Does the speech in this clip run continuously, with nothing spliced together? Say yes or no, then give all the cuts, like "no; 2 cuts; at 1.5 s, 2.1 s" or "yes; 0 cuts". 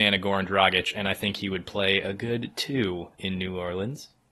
no; 1 cut; at 3.1 s